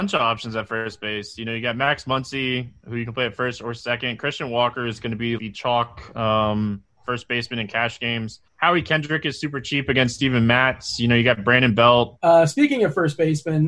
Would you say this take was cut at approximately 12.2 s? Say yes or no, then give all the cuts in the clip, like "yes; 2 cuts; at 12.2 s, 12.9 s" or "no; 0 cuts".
yes; 3 cuts; at 5.4 s, 8.5 s, 12.2 s